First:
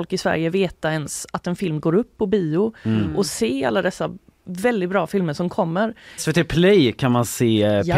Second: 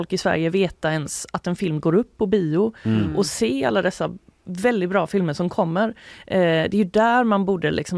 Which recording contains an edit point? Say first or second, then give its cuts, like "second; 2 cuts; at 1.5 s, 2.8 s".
first; 1 cut; at 6.2 s